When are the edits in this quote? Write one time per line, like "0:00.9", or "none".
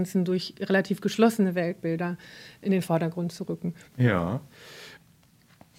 0:03.8